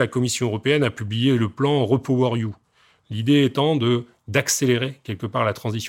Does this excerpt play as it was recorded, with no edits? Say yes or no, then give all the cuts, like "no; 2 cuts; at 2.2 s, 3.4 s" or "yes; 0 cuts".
yes; 0 cuts